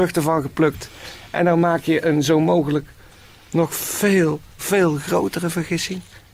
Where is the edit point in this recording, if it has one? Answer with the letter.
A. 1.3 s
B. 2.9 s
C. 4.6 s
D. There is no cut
C